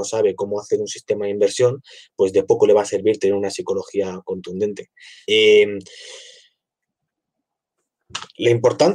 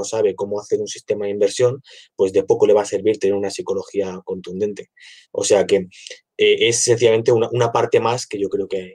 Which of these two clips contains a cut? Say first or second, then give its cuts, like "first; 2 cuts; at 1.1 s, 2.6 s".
first; 1 cut; at 5.2 s